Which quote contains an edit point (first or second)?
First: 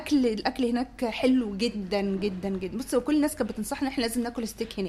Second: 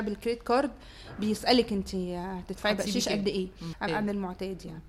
second